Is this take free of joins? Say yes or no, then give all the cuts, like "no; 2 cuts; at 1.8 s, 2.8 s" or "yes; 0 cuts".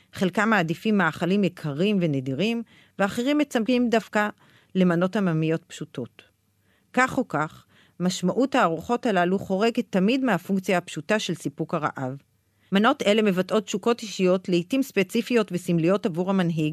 yes; 0 cuts